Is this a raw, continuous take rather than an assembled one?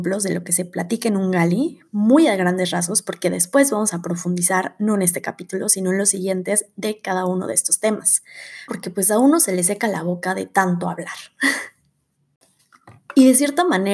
no; 1 cut; at 8.7 s

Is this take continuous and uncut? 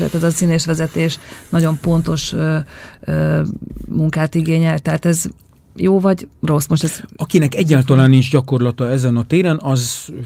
yes; 0 cuts

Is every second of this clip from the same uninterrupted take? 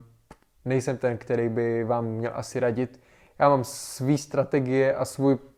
yes; 0 cuts

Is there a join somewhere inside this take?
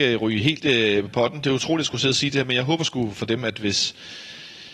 no; 0 cuts

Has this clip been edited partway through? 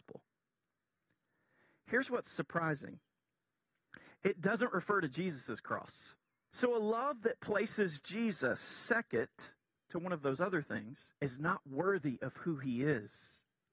yes; 2 cuts; at 6.5 s, 11.2 s

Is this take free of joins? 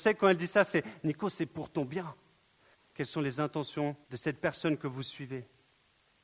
no; 2 cuts; at 2.7 s, 4.0 s

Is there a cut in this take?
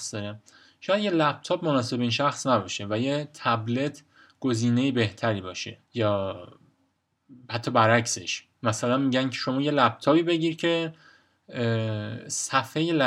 yes; 1 cut; at 5.8 s

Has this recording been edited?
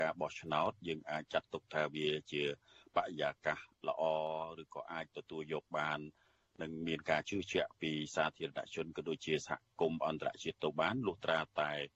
yes; 1 cut; at 1.2 s

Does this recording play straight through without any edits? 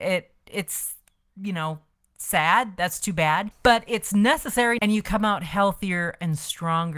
no; 2 cuts; at 3.5 s, 4.8 s

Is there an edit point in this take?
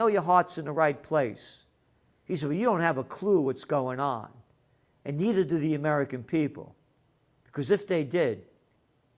no; 0 cuts

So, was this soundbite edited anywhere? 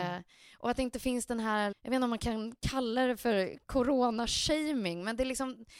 yes; 1 cut; at 1.7 s

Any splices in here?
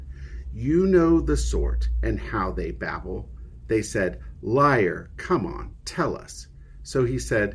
no; 0 cuts

